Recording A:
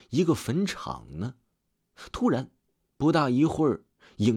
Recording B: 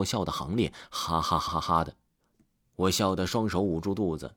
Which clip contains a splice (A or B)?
B